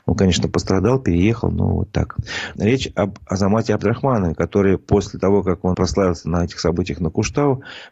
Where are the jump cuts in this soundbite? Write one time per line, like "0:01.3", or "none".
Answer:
0:02.6
0:05.7